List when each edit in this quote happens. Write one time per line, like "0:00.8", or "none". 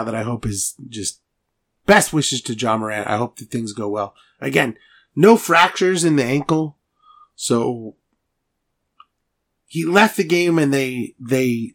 none